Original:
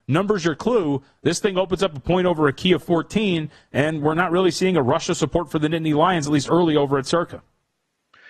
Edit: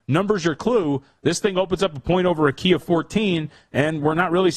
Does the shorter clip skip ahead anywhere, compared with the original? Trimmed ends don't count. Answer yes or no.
no